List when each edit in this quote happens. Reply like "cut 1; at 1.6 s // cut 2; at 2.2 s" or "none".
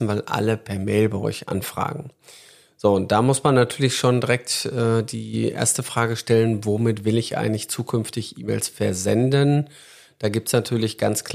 none